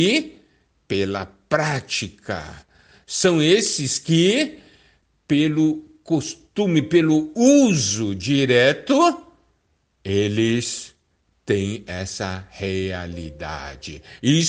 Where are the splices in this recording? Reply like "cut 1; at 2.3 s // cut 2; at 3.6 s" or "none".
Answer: none